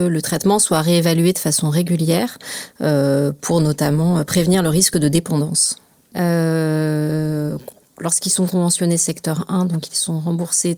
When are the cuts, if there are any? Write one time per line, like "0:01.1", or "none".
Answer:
0:06.1